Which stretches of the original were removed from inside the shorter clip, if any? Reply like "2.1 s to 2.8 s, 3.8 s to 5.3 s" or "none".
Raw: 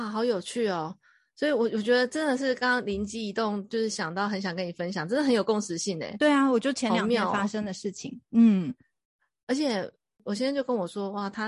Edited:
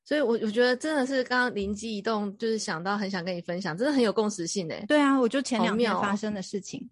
none

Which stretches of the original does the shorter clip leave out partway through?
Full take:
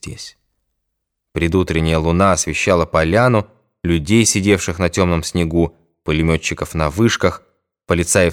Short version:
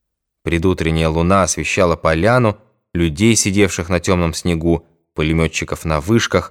none

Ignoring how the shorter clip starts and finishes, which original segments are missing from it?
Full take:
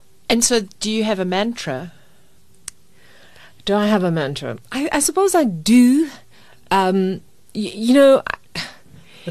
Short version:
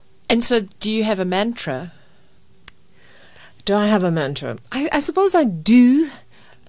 none

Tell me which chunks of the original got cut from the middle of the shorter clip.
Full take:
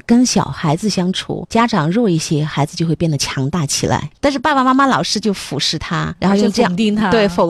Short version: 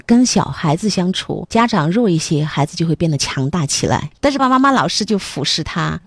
4.4 s to 4.5 s

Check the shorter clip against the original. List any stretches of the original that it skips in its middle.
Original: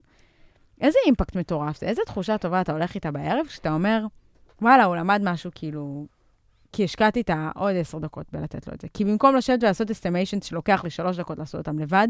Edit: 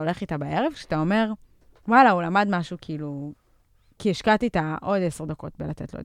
none

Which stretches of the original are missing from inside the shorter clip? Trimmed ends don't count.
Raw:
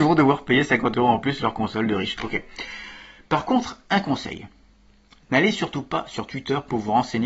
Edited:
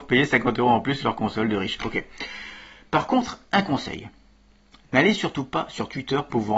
none

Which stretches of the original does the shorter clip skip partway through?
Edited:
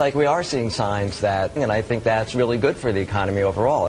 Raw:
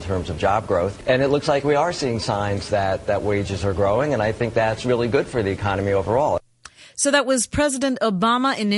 3.1 s to 4.1 s

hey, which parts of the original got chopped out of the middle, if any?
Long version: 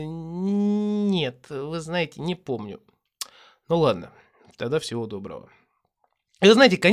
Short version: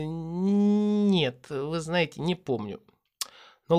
none

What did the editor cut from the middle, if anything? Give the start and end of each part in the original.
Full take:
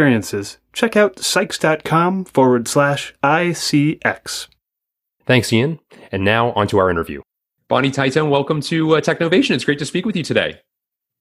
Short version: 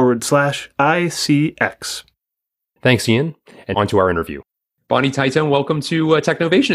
6.2 s to 6.5 s

